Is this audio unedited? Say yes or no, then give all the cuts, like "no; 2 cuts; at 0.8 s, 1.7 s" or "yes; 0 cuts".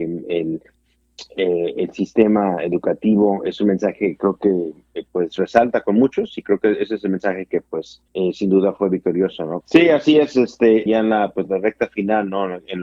no; 3 cuts; at 8.1 s, 9.6 s, 10.9 s